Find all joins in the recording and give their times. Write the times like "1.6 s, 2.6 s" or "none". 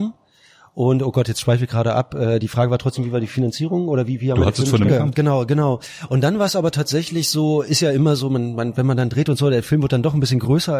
4.9 s